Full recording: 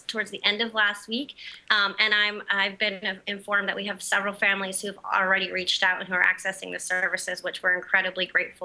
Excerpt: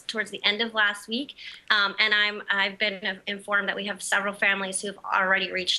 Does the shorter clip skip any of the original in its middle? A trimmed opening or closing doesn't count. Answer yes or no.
no